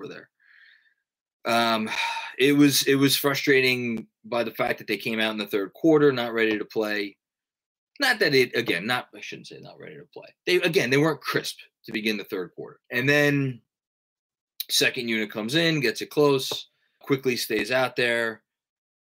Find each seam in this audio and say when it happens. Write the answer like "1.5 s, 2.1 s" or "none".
12.8 s, 17.0 s